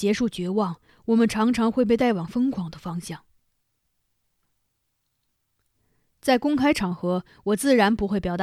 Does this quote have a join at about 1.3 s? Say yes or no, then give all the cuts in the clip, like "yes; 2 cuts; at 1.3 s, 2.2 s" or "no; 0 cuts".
no; 0 cuts